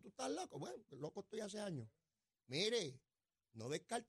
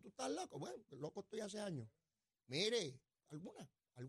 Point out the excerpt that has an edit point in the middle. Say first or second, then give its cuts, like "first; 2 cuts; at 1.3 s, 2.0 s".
second; 1 cut; at 3.2 s